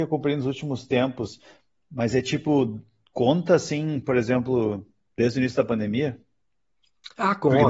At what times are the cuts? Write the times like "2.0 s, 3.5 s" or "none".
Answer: none